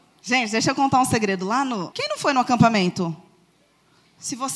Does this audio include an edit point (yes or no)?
yes